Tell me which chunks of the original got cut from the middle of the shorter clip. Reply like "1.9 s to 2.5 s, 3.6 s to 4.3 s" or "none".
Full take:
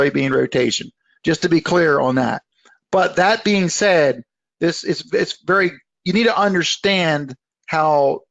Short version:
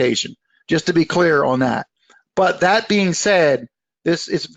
none

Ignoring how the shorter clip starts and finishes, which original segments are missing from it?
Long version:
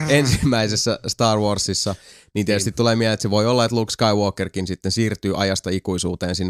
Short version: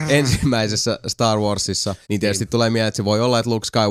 2.0 s to 2.3 s

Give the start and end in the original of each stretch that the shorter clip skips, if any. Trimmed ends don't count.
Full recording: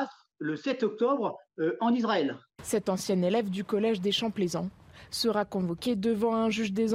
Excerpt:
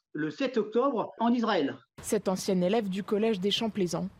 1.4 s to 1.8 s

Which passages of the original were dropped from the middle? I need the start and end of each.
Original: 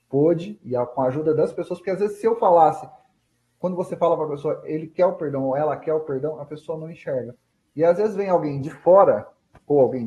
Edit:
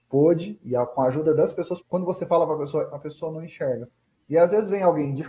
1.8 s to 3.5 s, 4.6 s to 6.4 s

